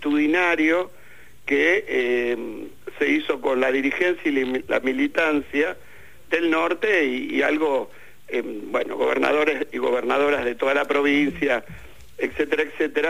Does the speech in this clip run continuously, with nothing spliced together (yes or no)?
yes